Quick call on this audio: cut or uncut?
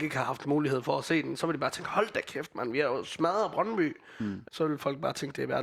cut